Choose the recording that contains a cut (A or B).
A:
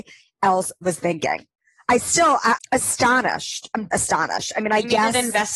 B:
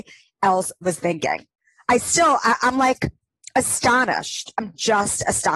A